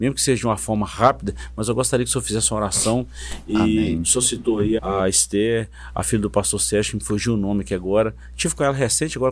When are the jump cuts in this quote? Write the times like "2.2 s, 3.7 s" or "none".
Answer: 4.8 s